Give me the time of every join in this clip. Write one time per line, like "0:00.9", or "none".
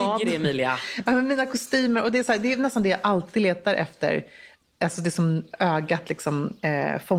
none